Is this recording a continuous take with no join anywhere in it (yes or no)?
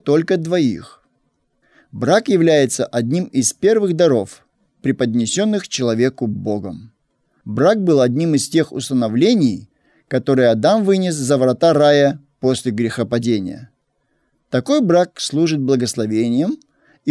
yes